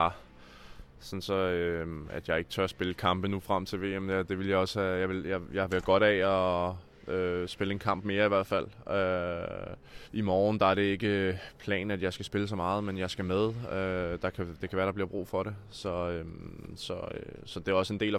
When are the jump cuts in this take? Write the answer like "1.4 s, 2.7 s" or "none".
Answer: 10.0 s